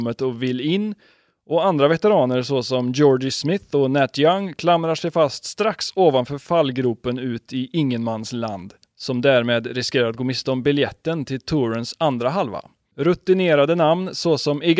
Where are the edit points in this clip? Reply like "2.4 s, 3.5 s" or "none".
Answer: 8.8 s